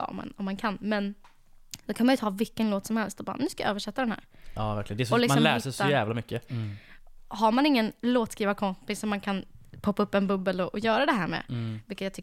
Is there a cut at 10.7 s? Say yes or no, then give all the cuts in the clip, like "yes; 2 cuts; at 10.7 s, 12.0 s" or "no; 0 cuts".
no; 1 cut; at 6.5 s